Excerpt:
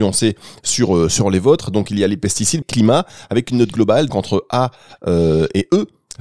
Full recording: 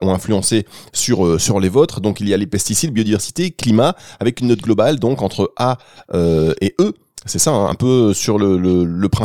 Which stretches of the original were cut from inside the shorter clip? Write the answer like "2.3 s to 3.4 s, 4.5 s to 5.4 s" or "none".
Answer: 2.9 s to 3.5 s, 5.0 s to 5.2 s